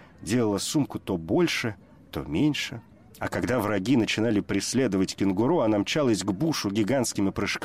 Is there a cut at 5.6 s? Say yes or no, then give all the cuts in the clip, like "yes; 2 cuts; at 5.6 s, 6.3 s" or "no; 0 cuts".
no; 1 cut; at 3.1 s